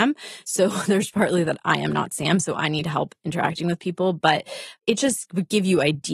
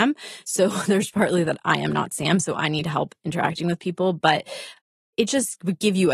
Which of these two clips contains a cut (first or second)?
first